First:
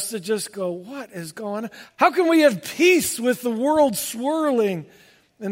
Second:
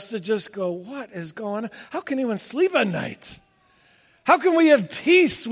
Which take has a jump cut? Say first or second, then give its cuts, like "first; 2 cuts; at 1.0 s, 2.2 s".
first; 1 cut; at 1.9 s